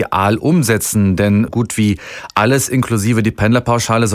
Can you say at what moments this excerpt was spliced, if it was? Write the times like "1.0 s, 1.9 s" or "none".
1.5 s